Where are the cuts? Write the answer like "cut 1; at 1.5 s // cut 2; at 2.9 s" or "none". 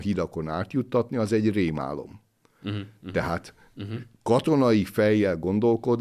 cut 1; at 3.7 s